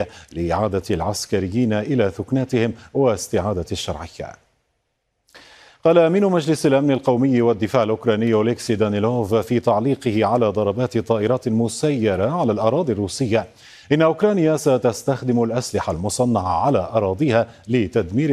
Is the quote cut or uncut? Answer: uncut